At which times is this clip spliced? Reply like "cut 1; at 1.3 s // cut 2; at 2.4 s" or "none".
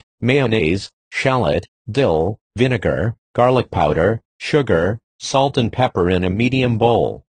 none

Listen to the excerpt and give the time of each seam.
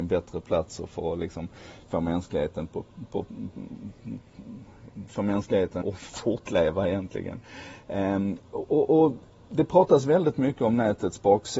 cut 1; at 5.8 s

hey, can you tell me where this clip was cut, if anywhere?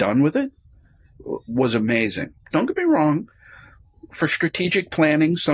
none

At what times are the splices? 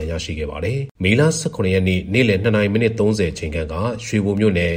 cut 1; at 0.9 s

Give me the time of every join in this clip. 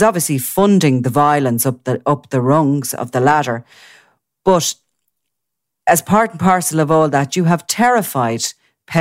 none

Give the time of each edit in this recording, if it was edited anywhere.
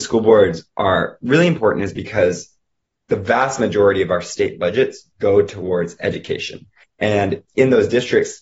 cut 1; at 6.8 s

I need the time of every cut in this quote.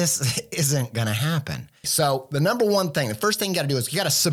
cut 1; at 1.8 s

